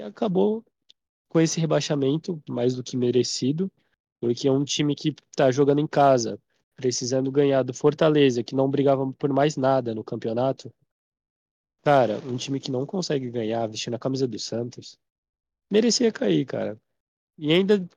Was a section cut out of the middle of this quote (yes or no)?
no